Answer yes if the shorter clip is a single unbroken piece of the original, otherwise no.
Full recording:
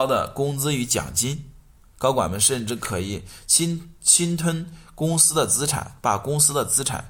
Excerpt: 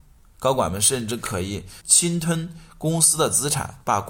no